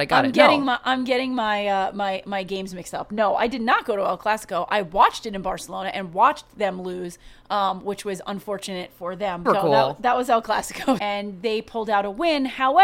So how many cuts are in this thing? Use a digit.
2